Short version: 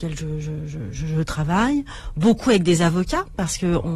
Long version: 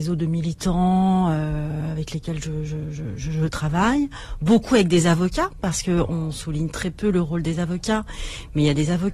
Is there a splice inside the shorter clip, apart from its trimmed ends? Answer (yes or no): no